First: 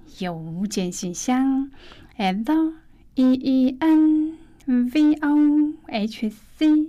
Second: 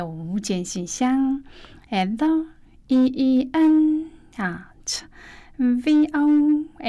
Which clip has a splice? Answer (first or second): first